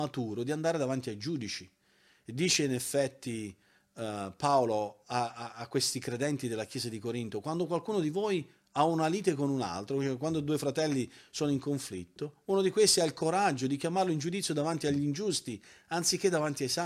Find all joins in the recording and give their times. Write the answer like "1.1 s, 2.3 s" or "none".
none